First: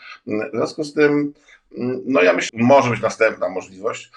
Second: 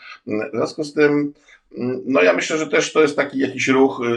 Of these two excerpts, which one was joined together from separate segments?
first; 1 cut; at 2.5 s

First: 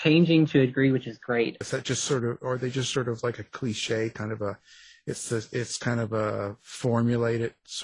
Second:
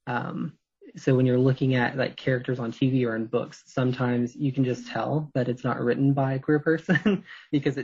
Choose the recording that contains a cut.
first; 1 cut; at 1.6 s

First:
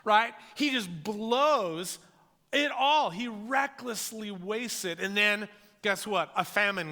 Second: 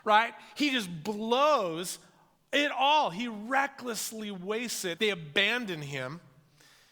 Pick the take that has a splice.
second; 1 cut; at 5.0 s

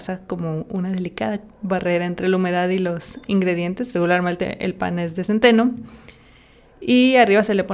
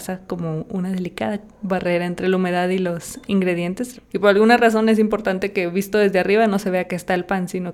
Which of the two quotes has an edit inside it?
second; 1 cut; at 3.9 s

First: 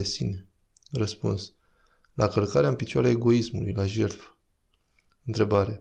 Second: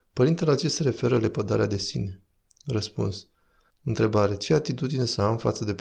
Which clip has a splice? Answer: second; 1 cut; at 3.7 s

